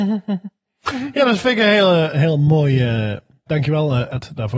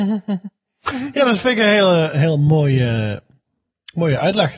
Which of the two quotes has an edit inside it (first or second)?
first